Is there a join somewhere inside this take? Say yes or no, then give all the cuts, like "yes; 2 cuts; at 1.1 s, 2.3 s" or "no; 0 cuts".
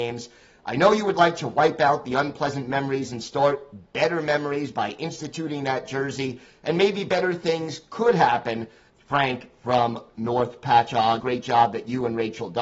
yes; 2 cuts; at 8.9 s, 11.2 s